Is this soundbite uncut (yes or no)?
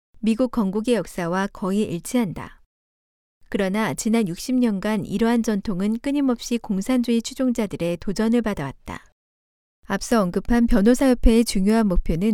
yes